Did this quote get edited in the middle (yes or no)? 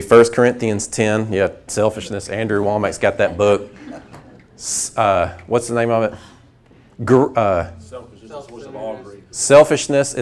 yes